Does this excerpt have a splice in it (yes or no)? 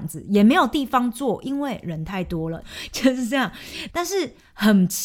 yes